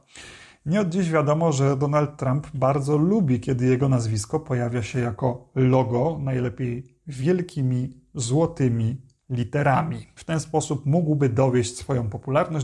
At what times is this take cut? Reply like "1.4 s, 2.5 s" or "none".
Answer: 10.2 s

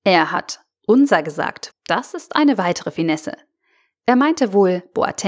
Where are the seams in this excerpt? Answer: 1.7 s

